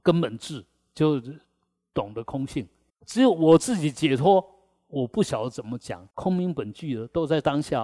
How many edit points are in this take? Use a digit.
2